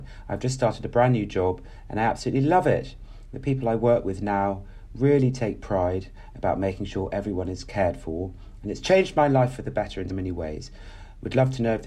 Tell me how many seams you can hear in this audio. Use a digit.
1